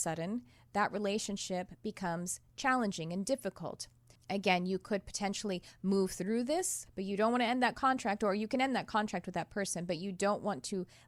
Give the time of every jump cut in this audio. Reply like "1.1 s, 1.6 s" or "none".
4.2 s, 6.9 s